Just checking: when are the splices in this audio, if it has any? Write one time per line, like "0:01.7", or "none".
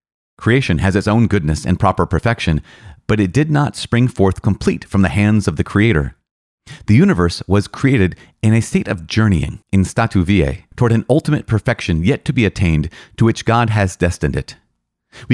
0:09.6
0:10.7